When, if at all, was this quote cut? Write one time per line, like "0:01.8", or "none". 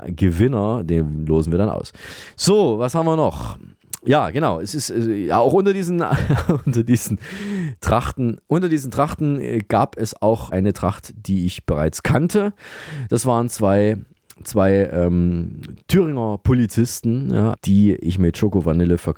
0:17.5